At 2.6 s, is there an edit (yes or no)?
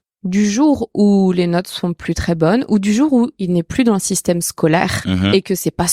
no